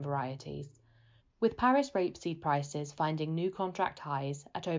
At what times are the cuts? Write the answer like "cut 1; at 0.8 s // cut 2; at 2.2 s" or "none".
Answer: cut 1; at 1.2 s